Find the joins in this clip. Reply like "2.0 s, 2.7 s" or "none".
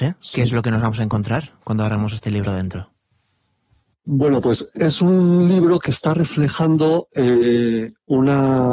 none